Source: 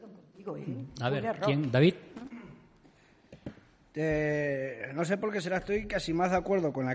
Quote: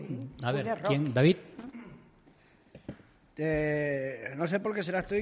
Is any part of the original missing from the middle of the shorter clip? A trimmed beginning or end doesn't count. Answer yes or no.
no